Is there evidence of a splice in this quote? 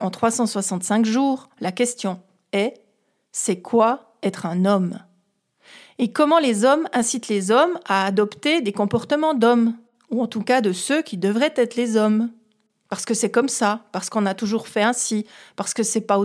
no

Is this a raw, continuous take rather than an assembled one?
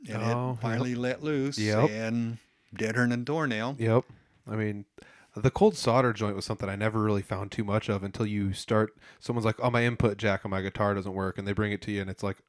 yes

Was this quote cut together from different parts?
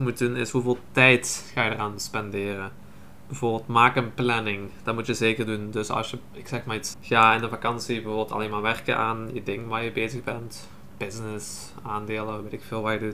yes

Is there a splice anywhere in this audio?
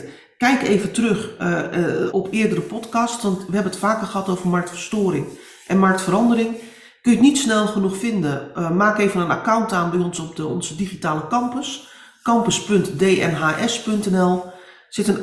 yes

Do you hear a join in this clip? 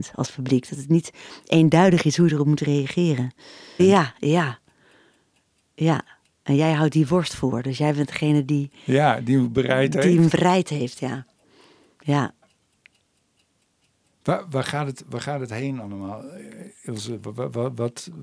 yes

